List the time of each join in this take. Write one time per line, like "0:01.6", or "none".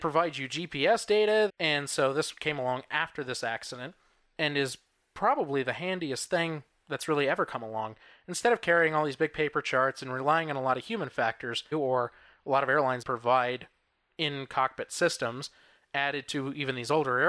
0:01.5
0:11.7
0:13.0